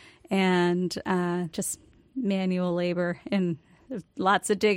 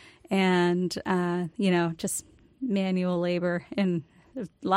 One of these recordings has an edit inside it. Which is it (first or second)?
first